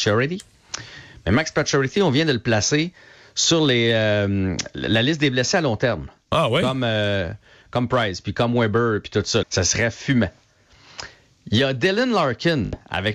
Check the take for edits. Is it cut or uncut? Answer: cut